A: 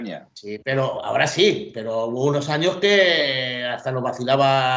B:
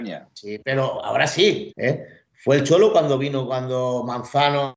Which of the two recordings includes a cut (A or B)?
B